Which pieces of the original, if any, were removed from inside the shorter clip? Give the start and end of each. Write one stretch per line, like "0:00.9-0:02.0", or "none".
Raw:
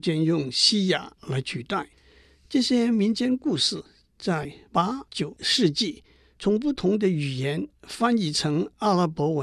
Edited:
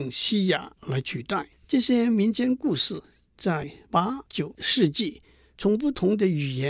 0:02.0-0:02.4